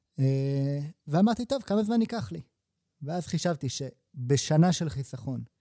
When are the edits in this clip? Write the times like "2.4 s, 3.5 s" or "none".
none